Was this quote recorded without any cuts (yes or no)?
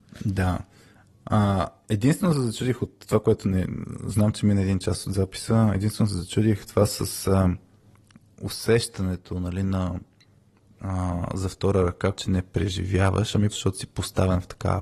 no